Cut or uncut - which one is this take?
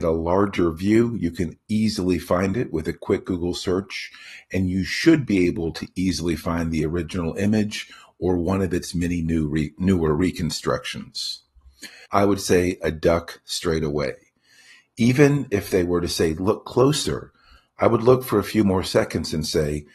cut